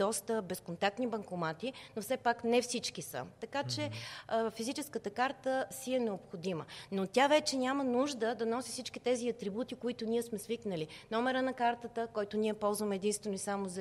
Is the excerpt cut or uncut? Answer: uncut